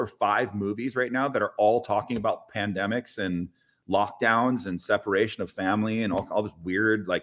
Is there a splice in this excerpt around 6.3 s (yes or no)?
no